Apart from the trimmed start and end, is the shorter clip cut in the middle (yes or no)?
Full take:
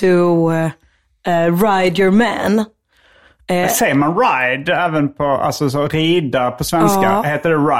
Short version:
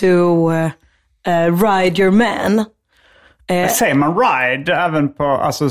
no